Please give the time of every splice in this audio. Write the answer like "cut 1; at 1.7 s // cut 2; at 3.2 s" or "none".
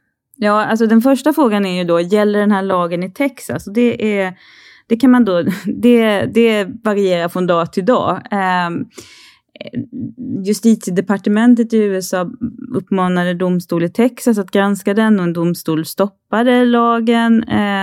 none

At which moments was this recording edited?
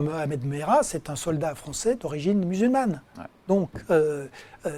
none

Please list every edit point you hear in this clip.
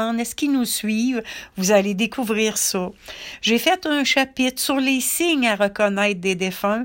none

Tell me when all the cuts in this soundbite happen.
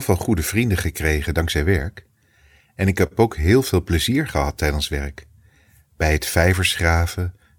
none

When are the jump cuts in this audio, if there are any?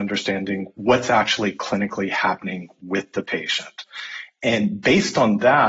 none

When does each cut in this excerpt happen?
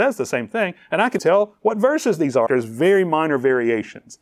cut 1; at 1.2 s // cut 2; at 2.5 s

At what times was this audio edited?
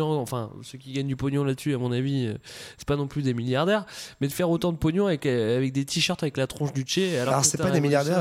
none

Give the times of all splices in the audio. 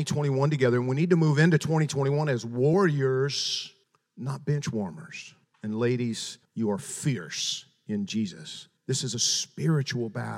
cut 1; at 6.4 s

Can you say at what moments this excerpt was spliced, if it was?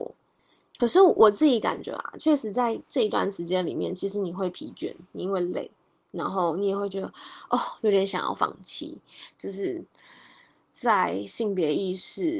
cut 1; at 9.3 s

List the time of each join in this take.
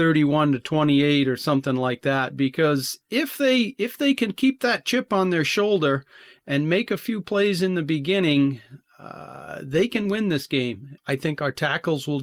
cut 1; at 11.0 s

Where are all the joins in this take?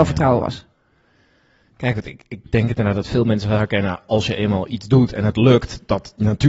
none

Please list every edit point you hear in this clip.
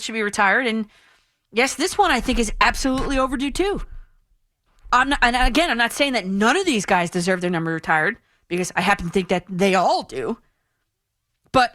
none

